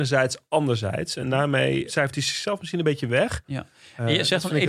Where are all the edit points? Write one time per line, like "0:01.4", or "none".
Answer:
0:03.4